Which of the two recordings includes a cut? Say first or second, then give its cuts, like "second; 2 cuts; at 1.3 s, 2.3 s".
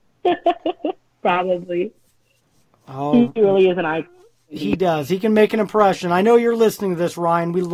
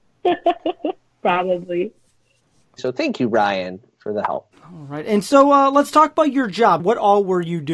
second; 3 cuts; at 2.8 s, 4.5 s, 6.8 s